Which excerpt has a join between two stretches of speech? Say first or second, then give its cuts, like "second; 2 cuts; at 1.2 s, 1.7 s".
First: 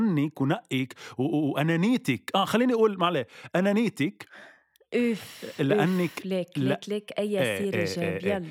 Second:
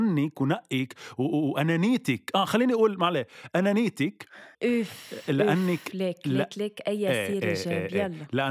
second; 1 cut; at 4.5 s